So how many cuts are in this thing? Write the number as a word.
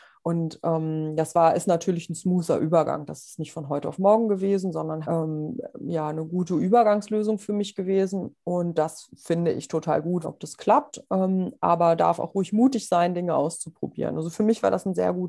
two